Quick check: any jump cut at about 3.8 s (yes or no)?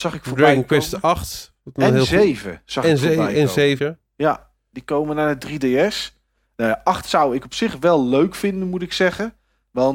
yes